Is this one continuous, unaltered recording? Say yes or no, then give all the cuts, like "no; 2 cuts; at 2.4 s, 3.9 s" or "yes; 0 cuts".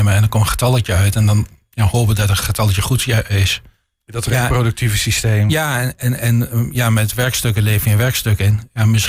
yes; 0 cuts